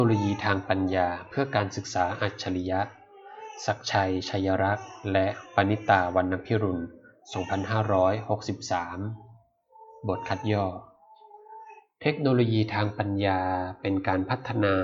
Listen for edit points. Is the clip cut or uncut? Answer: uncut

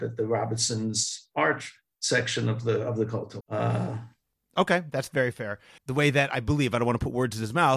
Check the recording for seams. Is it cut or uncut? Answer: cut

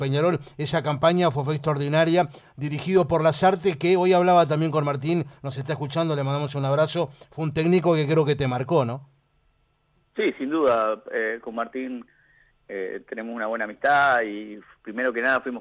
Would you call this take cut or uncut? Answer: uncut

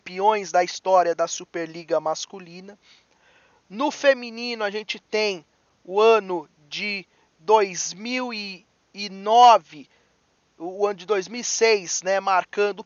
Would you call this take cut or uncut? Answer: uncut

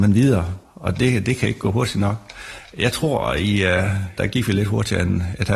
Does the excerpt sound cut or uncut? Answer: cut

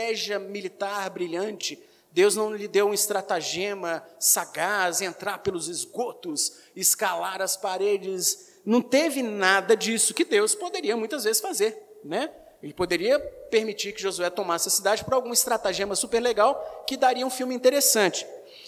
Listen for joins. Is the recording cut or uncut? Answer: uncut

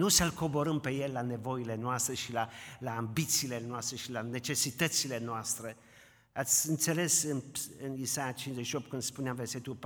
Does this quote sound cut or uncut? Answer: uncut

